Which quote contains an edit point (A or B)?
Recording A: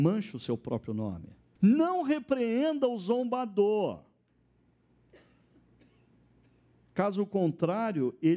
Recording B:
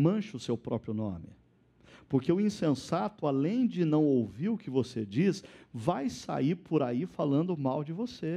A